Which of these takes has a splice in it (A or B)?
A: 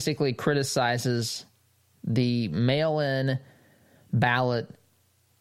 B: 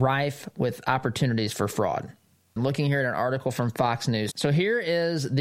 B